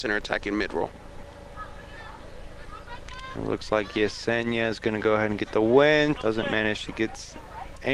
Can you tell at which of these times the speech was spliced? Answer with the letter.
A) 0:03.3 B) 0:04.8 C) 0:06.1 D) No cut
C